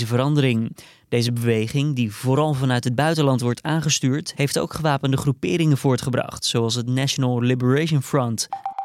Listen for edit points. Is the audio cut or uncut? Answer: uncut